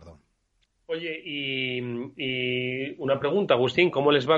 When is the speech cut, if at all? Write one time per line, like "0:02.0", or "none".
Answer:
none